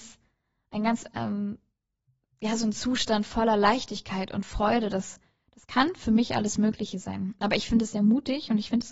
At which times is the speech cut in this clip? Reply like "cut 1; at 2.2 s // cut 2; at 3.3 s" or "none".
none